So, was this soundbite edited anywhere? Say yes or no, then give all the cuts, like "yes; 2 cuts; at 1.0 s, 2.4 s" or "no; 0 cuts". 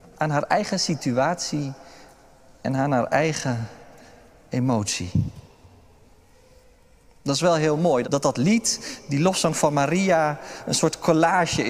yes; 1 cut; at 8.0 s